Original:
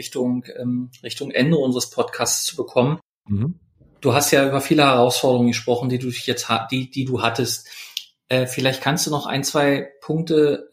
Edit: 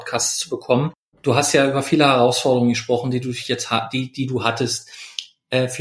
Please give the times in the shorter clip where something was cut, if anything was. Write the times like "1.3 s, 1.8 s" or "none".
1.1 s